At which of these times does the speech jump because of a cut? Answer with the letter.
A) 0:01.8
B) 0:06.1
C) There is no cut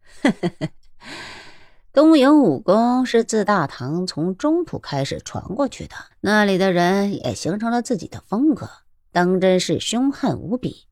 B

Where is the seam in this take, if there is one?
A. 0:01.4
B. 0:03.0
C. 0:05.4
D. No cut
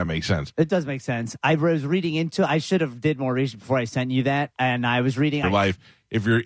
C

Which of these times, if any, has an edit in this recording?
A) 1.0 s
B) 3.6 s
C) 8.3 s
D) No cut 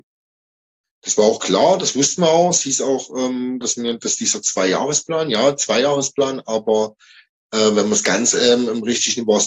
B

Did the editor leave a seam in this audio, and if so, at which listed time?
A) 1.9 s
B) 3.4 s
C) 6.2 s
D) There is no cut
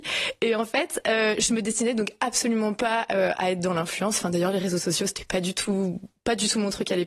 B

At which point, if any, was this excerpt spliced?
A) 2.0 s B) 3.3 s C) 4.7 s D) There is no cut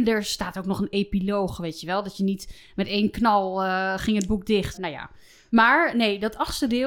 C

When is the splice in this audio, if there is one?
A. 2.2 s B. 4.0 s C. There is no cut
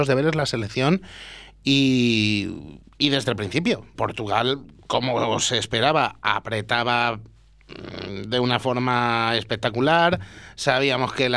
B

